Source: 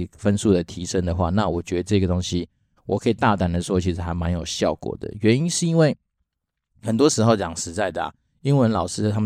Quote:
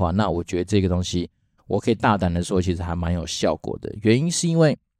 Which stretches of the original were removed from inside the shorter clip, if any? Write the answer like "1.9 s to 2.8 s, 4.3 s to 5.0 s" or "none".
none